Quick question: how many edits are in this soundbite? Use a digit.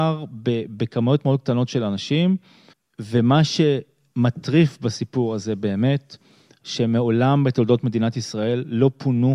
0